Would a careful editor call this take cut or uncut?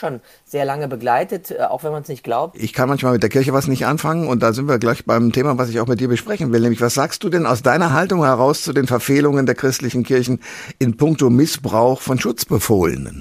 cut